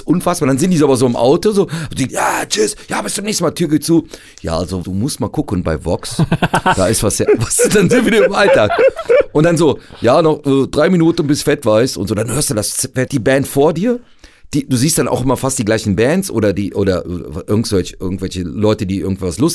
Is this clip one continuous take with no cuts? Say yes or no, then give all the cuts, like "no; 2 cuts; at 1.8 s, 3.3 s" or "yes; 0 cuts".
no; 3 cuts; at 2.1 s, 4.8 s, 13.1 s